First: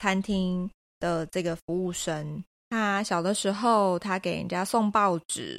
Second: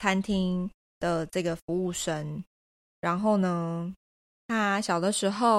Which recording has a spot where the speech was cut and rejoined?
first; 1 cut; at 2.6 s

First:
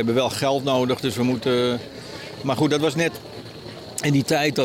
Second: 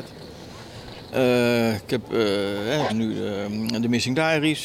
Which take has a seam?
second; 2 cuts; at 1.1 s, 2.9 s

